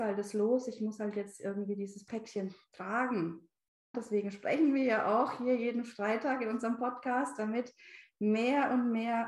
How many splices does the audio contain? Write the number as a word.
one